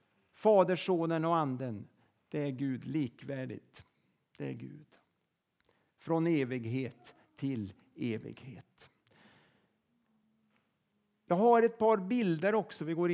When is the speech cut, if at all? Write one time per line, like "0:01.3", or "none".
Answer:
none